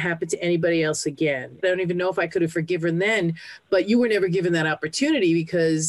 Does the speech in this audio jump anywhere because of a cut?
yes; 1 cut; at 1.6 s

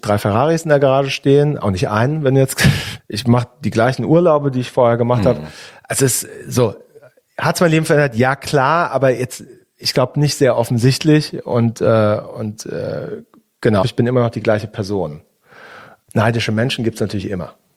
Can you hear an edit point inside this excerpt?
yes; 2 cuts; at 3.0 s, 13.8 s

